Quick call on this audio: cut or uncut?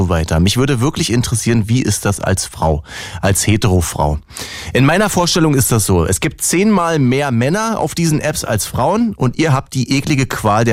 uncut